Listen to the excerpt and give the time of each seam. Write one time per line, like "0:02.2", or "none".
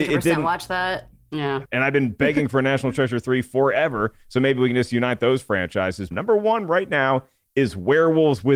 0:01.7
0:06.1